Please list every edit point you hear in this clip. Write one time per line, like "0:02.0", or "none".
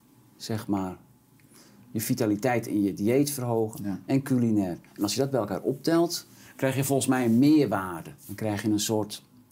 none